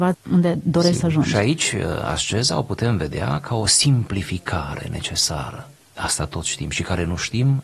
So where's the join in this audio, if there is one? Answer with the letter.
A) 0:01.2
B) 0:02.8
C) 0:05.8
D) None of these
C